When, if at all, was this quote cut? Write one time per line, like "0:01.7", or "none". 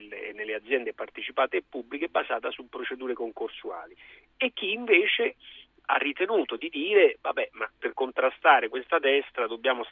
0:07.7